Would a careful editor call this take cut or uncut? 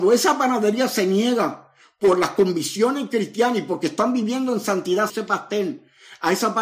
cut